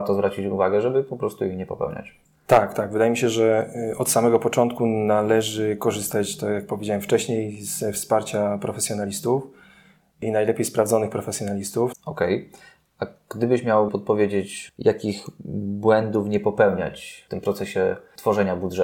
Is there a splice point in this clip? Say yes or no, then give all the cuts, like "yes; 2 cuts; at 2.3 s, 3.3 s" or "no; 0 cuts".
yes; 2 cuts; at 11.9 s, 13.9 s